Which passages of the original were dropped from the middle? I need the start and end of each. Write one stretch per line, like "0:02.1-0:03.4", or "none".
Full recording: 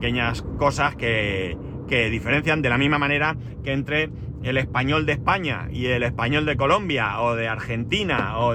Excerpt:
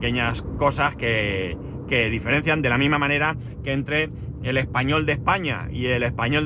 none